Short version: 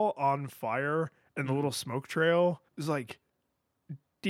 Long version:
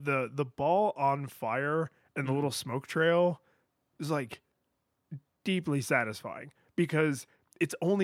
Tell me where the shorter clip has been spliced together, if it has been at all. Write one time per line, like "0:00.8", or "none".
0:02.7